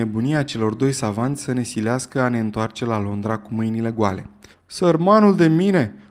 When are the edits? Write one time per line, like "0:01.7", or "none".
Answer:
0:04.5